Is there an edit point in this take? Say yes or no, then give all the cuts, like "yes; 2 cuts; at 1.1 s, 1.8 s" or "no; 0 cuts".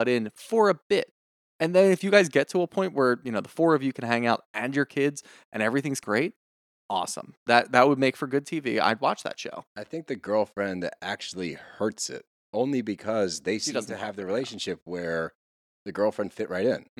no; 0 cuts